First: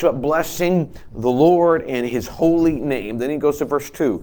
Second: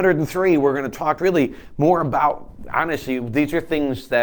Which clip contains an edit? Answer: second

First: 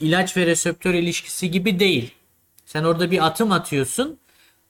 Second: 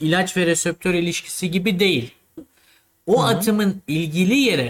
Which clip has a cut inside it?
second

